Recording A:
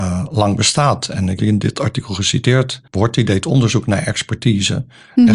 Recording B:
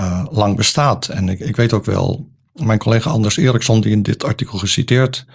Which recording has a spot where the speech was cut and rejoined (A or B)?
A